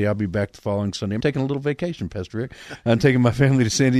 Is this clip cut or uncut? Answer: cut